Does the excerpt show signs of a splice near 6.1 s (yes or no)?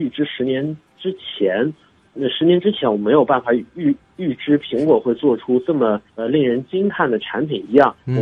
yes